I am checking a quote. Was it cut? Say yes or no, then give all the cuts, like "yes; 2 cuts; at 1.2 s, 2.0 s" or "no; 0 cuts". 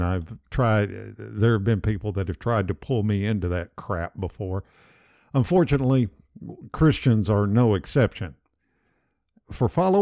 no; 0 cuts